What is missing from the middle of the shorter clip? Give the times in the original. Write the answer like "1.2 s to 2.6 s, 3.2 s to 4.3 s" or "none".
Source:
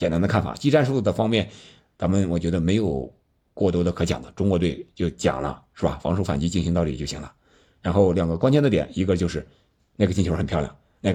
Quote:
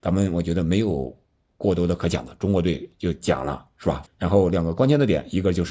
6.0 s to 7.7 s